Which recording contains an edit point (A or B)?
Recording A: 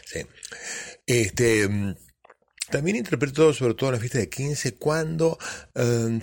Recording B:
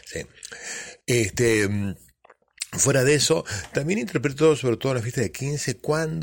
A